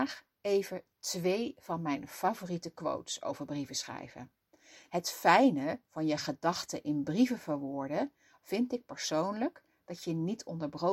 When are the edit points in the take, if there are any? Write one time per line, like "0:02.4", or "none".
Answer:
0:04.9